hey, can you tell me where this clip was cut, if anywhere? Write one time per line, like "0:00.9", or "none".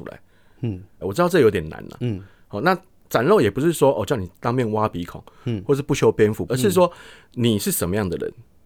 0:01.0
0:06.5